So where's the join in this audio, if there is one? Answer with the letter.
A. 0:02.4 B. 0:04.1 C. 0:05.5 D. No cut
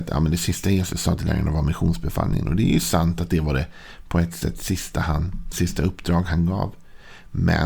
C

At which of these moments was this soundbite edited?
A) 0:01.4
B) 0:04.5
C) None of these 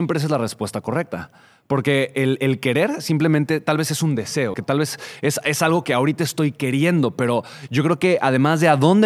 B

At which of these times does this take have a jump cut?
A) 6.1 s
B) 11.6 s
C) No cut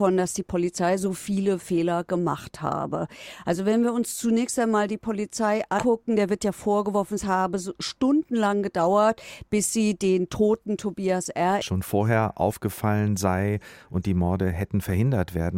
B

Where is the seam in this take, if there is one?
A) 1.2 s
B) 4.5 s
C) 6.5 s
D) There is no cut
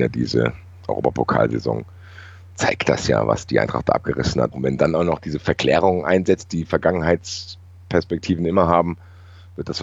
B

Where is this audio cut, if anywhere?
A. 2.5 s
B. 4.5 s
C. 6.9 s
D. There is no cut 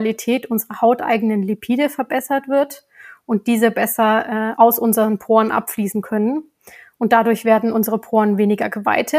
B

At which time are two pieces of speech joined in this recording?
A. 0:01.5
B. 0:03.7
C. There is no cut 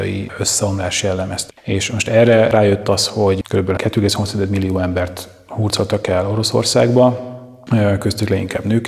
A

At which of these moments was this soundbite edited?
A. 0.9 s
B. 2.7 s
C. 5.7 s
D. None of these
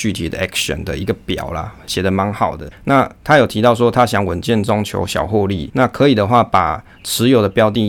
B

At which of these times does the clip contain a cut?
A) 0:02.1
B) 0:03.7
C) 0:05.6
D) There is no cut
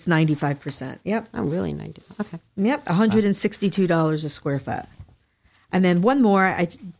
D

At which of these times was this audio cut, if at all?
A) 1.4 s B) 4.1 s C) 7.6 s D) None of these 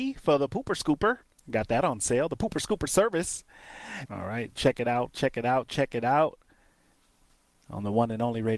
B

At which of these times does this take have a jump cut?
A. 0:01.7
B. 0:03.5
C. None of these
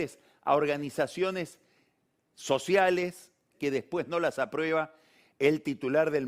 B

